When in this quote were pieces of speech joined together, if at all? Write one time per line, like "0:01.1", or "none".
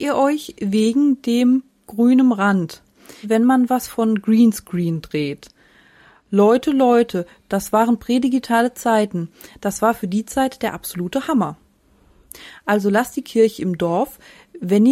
0:03.2